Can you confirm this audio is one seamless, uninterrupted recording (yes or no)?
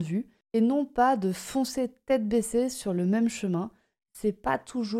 yes